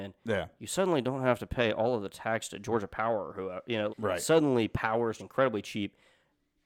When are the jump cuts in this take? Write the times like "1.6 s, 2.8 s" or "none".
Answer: 3.9 s, 5.2 s